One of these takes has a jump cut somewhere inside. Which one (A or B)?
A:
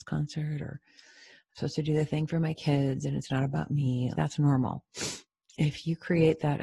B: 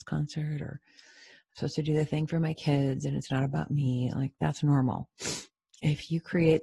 A